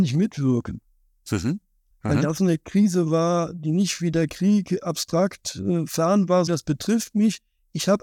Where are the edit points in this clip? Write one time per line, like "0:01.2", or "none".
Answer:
0:01.9
0:06.5